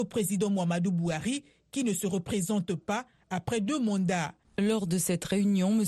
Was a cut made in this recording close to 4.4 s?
yes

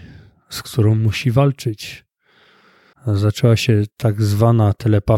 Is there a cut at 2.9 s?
yes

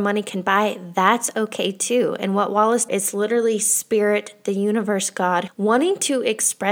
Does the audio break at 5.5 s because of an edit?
yes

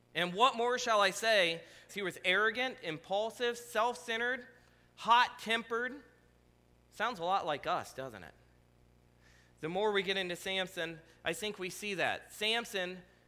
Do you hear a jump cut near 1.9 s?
yes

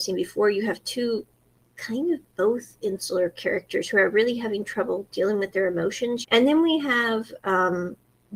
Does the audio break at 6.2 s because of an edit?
yes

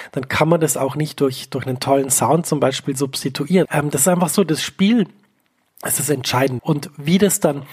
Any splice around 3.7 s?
yes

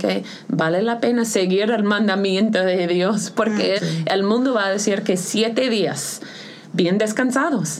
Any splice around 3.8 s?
yes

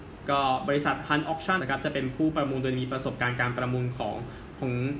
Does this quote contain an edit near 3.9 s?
no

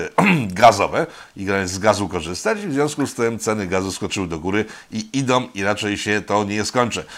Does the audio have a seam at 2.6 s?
no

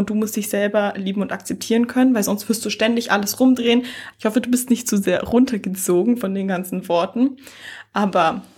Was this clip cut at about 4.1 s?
yes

